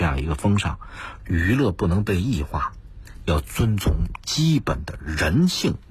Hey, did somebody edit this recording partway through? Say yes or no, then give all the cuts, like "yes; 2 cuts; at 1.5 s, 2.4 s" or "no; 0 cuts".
yes; 1 cut; at 1.2 s